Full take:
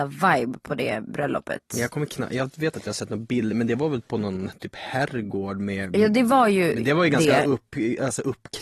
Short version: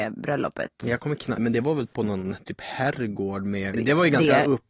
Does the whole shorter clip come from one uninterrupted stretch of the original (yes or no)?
no